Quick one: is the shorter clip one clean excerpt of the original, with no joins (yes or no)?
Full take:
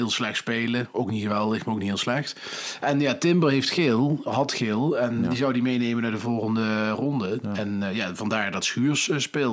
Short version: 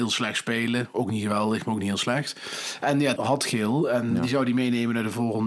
no